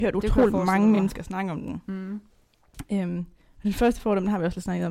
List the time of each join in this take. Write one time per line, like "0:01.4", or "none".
none